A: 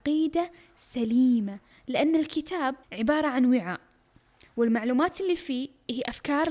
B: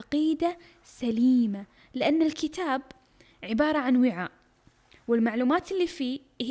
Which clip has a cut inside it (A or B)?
A